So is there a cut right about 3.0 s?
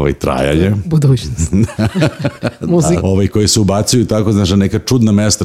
yes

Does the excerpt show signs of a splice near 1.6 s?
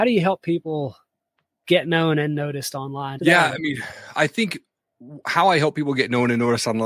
no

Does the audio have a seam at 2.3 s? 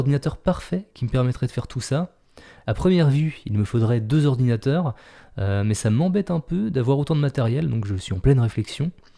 no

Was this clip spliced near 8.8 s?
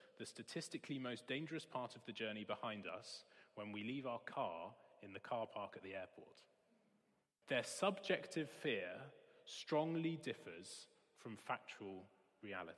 no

